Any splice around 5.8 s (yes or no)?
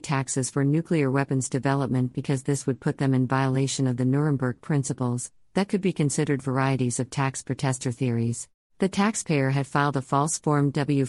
no